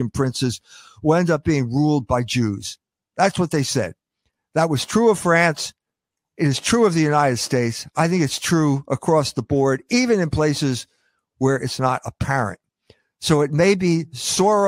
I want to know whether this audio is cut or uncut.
uncut